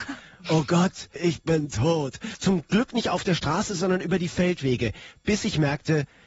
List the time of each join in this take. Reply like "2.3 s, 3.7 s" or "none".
1.2 s, 2.3 s